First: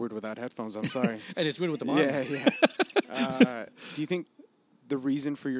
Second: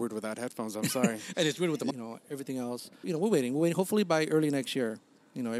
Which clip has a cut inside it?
second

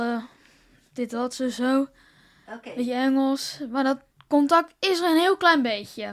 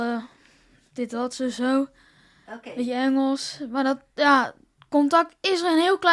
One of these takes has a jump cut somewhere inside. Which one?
first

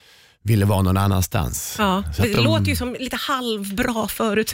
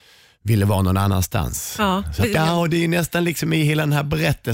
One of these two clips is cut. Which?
second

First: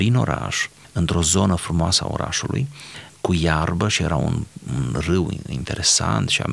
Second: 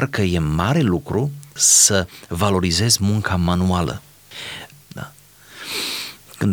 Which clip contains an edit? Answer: second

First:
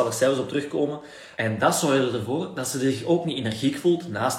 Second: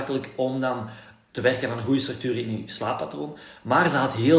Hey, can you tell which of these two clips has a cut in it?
first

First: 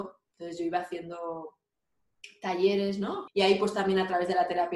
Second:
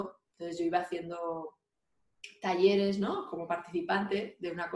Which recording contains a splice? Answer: first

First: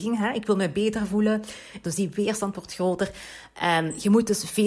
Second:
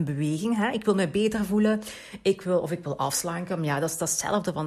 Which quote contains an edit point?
first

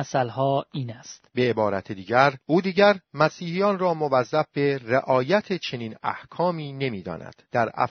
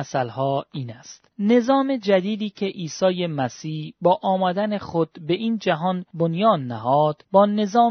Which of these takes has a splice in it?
first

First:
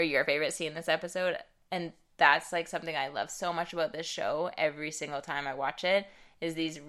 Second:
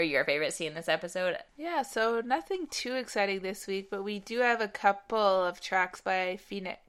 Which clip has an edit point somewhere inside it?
second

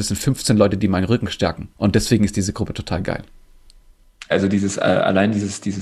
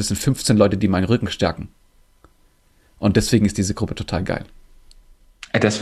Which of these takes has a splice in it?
first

